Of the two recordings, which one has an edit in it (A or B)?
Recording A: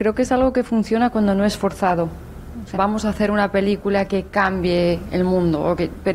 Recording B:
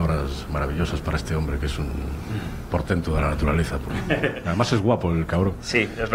A